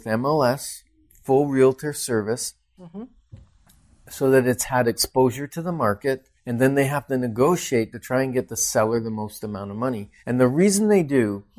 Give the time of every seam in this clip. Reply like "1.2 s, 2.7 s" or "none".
2.8 s, 6.4 s, 10.2 s

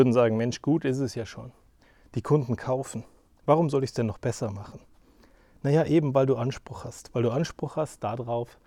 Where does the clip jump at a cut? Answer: none

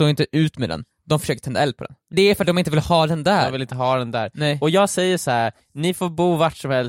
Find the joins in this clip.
2.1 s

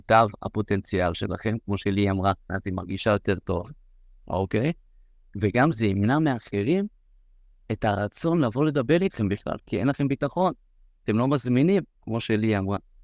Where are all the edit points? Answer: 2.5 s

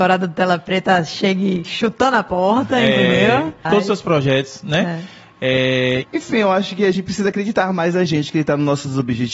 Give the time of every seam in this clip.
3.6 s, 6.0 s

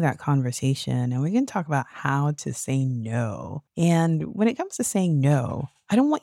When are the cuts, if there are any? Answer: 3.7 s

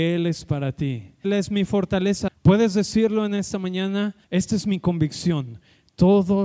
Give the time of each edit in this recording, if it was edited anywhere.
1.2 s, 2.3 s, 4.2 s

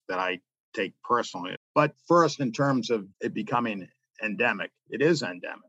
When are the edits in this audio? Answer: 1.5 s, 3.1 s

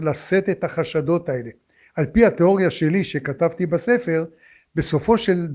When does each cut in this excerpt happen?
none

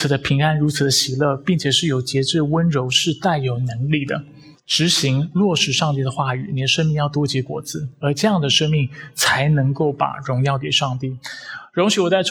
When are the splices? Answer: 4.5 s

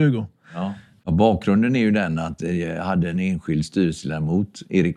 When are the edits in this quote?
1.0 s

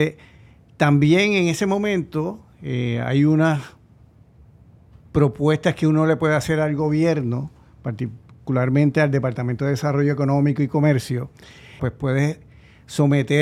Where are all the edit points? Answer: 11.8 s

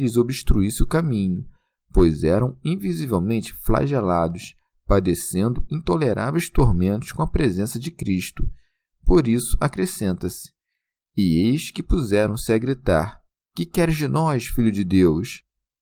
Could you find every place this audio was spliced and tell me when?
none

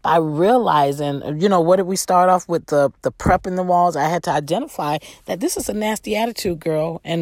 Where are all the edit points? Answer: none

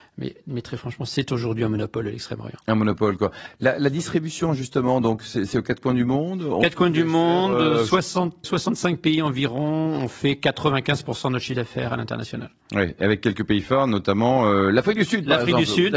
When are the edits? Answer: 8.4 s

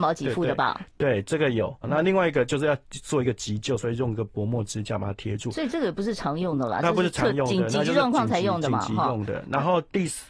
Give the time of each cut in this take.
1.8 s

